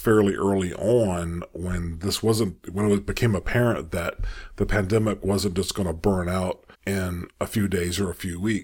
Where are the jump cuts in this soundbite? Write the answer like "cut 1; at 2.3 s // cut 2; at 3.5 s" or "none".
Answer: cut 1; at 2.6 s // cut 2; at 6.7 s

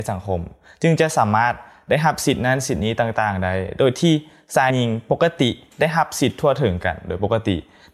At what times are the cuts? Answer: cut 1; at 4.7 s

